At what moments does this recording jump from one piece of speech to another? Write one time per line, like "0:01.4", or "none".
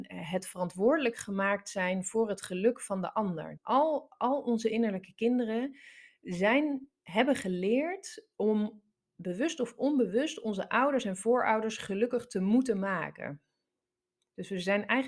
0:03.6